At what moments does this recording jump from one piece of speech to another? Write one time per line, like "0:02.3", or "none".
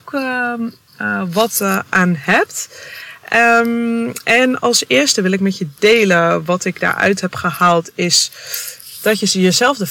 none